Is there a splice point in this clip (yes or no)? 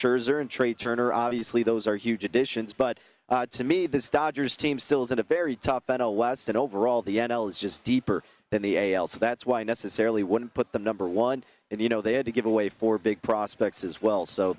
no